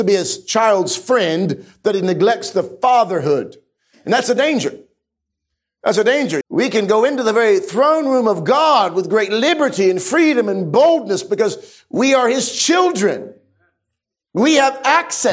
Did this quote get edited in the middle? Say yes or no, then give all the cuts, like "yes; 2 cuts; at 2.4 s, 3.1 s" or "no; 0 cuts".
yes; 1 cut; at 6.4 s